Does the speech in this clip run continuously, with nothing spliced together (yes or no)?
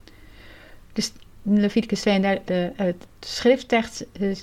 no